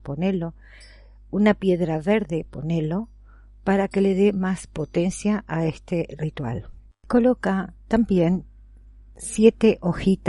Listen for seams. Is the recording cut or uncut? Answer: uncut